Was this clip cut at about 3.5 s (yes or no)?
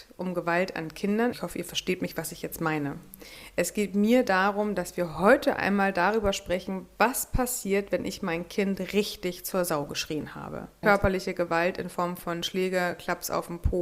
no